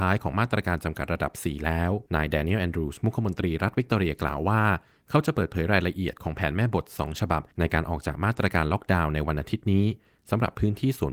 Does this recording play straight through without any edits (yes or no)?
no